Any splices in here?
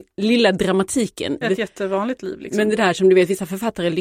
yes; 1 cut; at 1.4 s

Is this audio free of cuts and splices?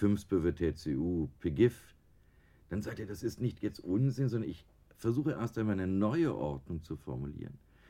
yes; 0 cuts

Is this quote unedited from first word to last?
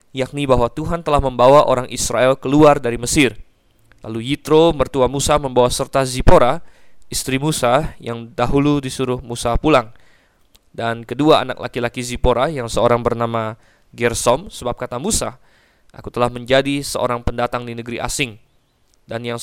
yes; 0 cuts

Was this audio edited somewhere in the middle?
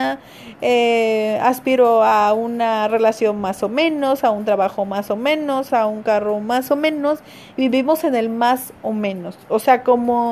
yes; 1 cut; at 5.7 s

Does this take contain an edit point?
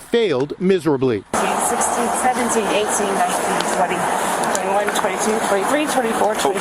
no; 0 cuts

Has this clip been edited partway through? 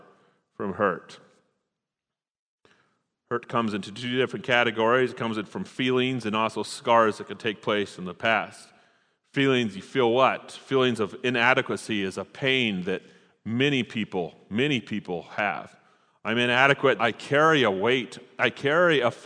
yes; 1 cut; at 17.0 s

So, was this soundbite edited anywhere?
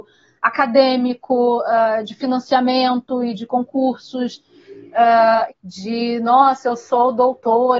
yes; 1 cut; at 5.5 s

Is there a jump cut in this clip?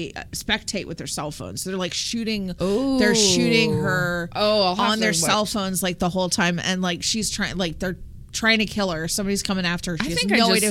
no; 0 cuts

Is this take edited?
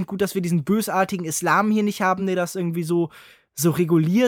no; 0 cuts

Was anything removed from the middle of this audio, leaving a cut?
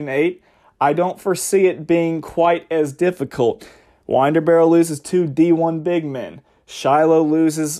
no; 0 cuts

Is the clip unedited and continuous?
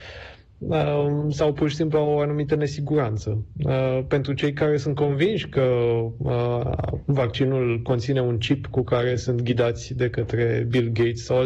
yes; 0 cuts

